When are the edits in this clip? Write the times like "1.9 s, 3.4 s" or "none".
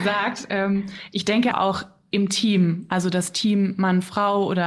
1.5 s